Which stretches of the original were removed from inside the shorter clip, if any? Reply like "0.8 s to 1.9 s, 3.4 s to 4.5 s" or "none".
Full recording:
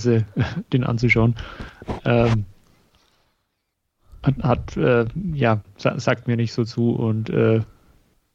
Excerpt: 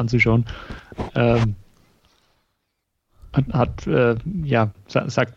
none